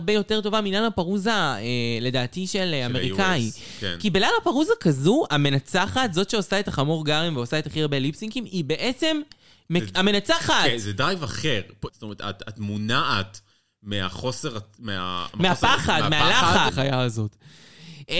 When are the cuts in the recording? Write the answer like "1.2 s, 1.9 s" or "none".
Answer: 11.9 s, 16.7 s